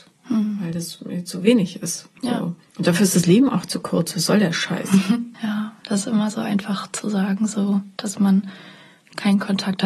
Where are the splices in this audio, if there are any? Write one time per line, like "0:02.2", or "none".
0:05.3